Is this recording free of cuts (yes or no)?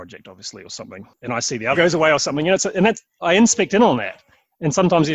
no